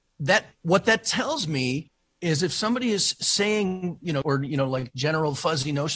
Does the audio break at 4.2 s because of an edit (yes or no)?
yes